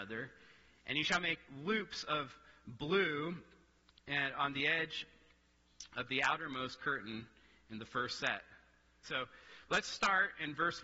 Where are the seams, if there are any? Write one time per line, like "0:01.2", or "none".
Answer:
0:09.0